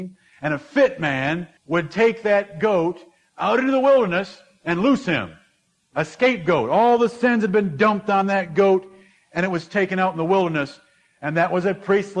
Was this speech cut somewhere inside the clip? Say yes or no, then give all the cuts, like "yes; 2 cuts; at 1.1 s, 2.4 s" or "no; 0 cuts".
yes; 1 cut; at 1.6 s